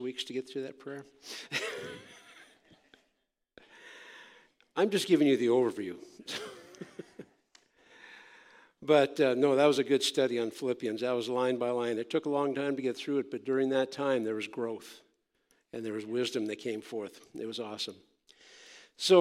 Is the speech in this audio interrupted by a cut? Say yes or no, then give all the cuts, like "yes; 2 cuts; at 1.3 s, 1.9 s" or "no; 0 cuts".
no; 0 cuts